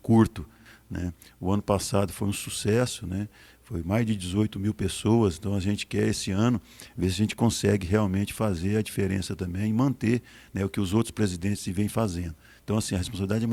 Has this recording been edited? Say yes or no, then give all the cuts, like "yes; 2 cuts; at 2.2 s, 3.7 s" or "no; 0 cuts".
no; 0 cuts